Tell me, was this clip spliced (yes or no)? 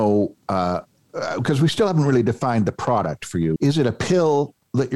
yes